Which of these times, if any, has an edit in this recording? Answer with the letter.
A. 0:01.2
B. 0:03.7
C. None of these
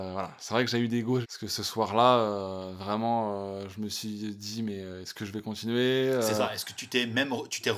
A